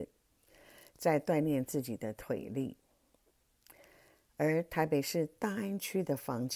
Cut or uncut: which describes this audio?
uncut